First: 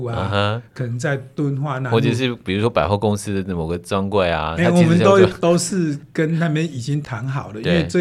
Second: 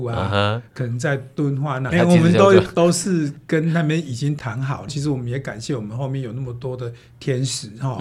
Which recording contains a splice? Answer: second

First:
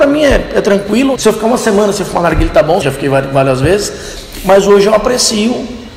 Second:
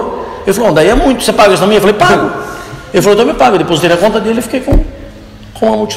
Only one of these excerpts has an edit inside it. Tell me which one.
first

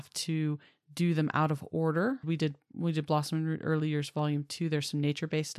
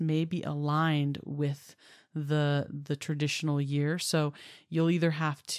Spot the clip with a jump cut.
first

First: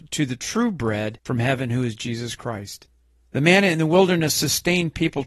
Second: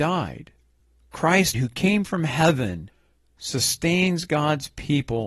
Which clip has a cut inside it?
second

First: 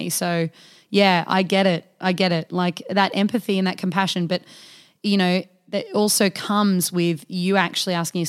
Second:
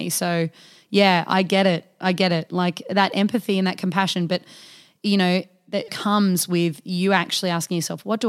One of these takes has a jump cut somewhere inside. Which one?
second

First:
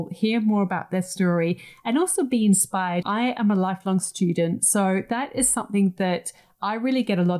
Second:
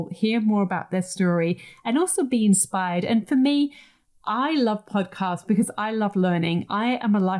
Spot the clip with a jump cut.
first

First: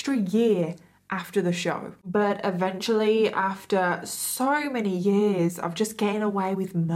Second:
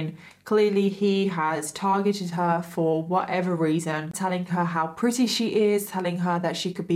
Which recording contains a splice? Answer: second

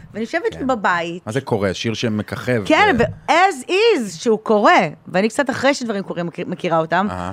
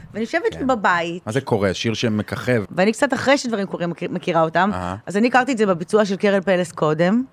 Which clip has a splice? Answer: second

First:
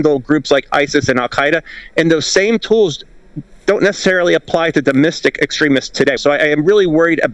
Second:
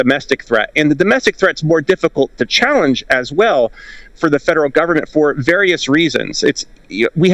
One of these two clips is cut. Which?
first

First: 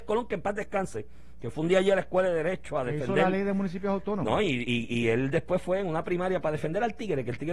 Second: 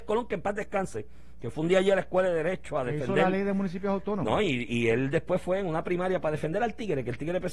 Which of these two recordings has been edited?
second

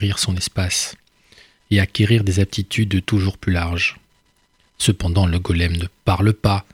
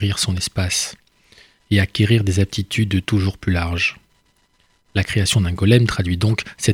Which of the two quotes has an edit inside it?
first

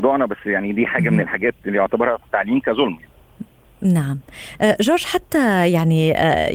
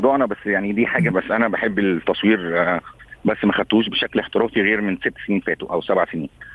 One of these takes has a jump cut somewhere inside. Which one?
second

